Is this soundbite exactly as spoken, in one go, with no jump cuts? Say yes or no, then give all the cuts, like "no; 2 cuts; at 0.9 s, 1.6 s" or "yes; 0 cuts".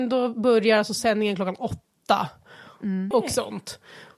no; 1 cut; at 3.1 s